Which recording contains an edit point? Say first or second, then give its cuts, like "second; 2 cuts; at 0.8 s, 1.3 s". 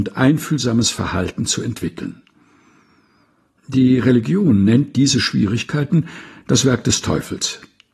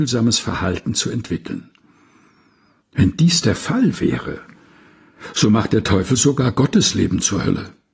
second; 1 cut; at 2.8 s